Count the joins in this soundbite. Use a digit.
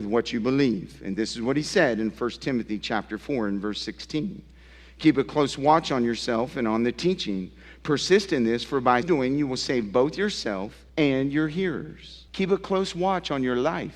3